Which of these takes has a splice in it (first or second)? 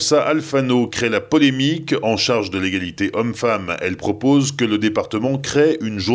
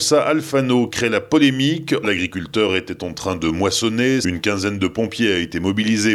second